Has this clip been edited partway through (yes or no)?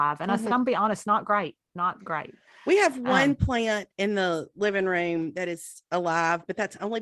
no